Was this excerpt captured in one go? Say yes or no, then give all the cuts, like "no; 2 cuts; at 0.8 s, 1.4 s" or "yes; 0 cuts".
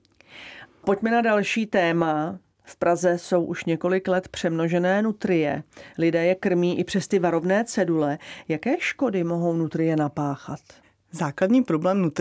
yes; 0 cuts